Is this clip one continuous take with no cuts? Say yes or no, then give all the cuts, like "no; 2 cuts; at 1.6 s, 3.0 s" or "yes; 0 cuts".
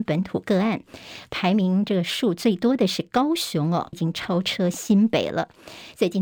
no; 1 cut; at 3.9 s